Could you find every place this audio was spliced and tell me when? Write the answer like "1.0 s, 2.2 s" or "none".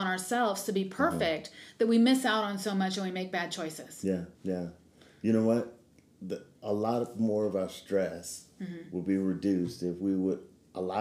4.3 s